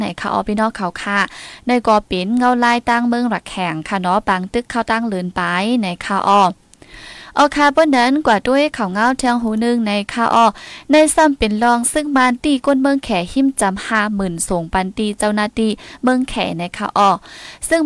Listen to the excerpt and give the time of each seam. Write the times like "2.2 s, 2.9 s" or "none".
none